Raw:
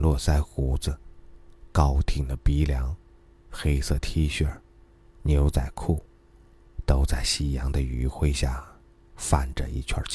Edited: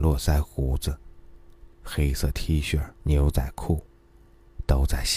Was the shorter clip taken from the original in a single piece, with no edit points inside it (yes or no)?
no